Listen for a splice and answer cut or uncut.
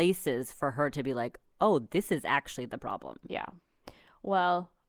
uncut